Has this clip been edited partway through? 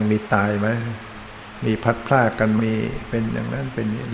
yes; 1 cut; at 2.6 s

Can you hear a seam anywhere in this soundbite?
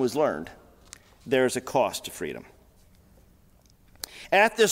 no; 0 cuts

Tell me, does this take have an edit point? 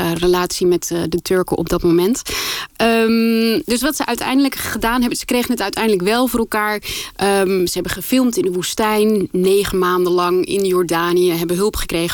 no; 0 cuts

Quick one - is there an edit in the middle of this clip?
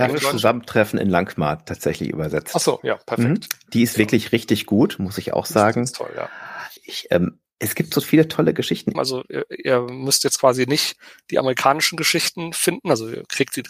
yes; 2 cuts; at 6.8 s, 8.9 s

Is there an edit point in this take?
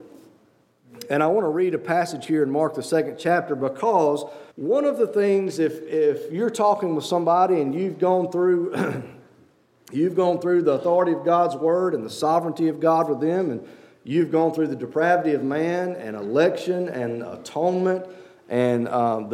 yes; 1 cut; at 4.5 s

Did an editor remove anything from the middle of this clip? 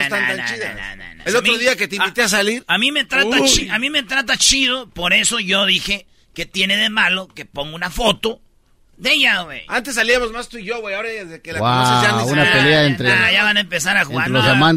yes; 1 cut; at 1.3 s

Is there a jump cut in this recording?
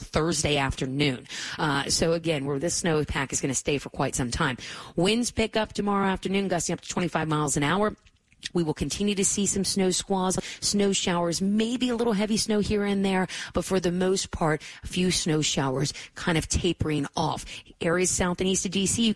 yes; 1 cut; at 8.5 s

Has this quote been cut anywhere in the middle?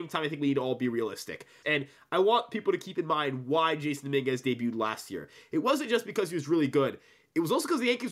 yes; 1 cut; at 1.6 s

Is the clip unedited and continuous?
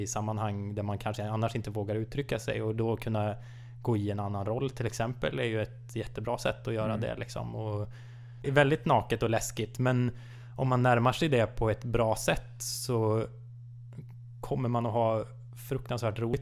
no; 1 cut; at 8.4 s

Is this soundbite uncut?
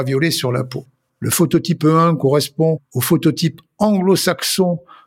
no; 1 cut; at 1.1 s

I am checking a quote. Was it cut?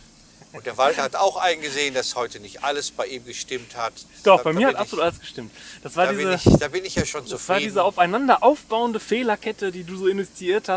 no; 0 cuts

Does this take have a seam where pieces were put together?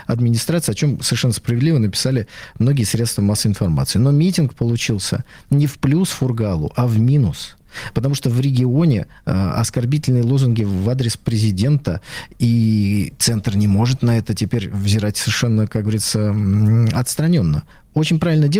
no; 0 cuts

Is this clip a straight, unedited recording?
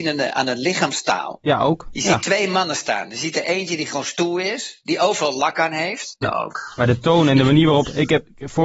no; 1 cut; at 6.2 s

